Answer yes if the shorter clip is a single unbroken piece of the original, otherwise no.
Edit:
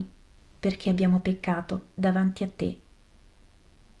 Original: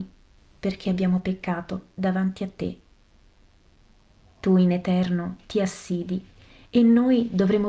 yes